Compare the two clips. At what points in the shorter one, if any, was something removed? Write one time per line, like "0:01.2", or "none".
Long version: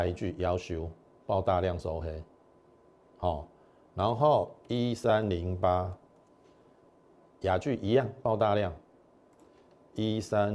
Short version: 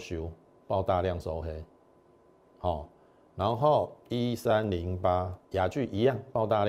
0:05.4